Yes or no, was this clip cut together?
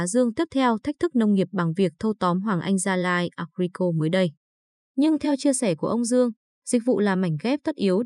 yes